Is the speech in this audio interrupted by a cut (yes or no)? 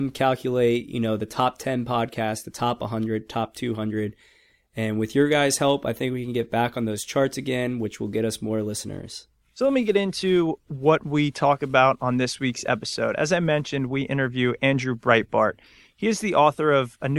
no